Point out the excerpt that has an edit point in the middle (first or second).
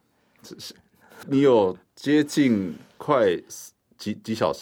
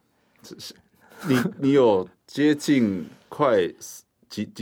first